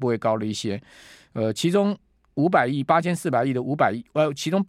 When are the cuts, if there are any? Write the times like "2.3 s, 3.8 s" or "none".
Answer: none

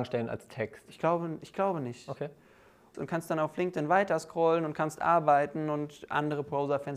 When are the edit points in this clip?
2.9 s

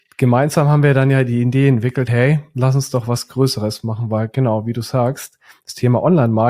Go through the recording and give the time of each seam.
none

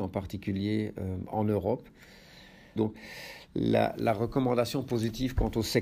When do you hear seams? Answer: 2.8 s

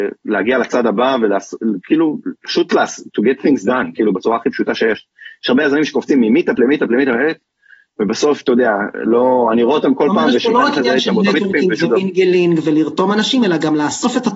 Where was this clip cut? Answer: none

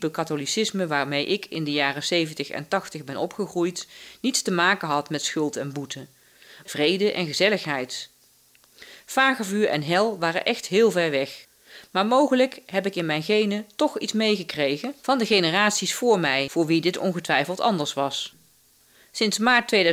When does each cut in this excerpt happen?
6.7 s

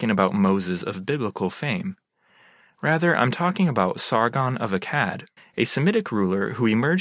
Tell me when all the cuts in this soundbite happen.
5.4 s

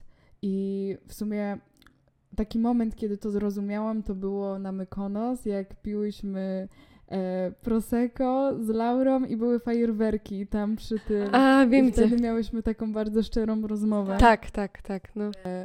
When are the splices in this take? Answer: 14.5 s

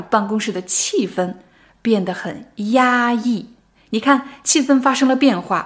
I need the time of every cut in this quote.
none

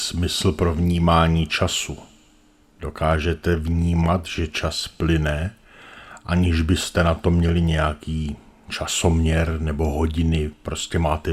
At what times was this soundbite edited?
none

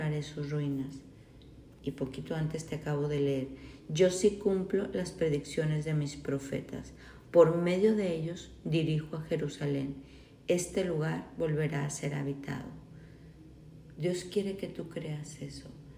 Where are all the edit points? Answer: none

